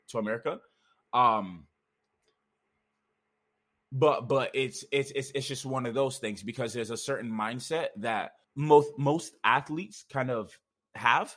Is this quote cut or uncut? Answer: cut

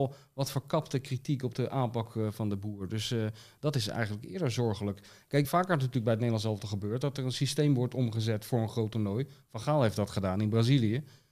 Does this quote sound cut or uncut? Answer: cut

